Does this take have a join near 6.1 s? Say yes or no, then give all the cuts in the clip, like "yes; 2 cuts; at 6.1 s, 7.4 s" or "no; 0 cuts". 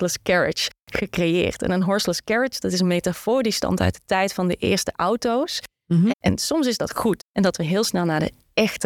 yes; 2 cuts; at 6.1 s, 7.2 s